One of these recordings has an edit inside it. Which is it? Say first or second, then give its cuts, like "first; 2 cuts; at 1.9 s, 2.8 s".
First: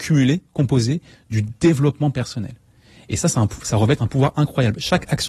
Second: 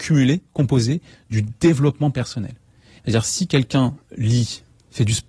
second; 1 cut; at 3.0 s